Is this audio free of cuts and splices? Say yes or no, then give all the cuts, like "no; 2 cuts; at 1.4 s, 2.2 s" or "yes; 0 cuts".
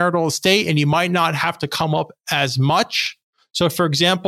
yes; 0 cuts